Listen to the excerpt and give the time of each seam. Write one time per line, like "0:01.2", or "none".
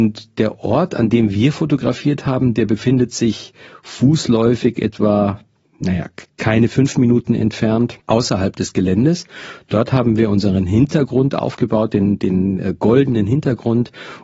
0:08.0